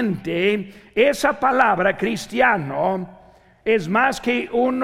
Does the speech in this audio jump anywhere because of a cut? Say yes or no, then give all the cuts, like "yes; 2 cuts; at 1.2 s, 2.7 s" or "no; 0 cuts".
no; 0 cuts